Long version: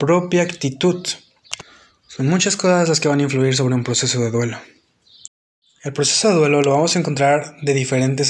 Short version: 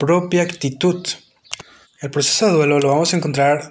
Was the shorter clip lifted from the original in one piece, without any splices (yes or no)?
no